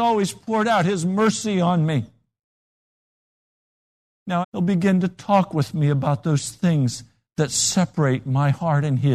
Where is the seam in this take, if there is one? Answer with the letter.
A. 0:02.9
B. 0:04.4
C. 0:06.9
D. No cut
B